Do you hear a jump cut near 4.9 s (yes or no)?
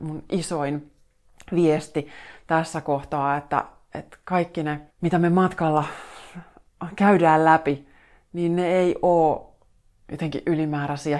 yes